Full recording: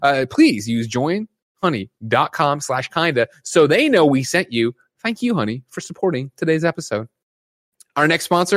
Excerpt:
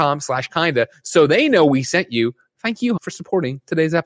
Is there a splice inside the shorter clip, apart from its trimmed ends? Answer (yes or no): yes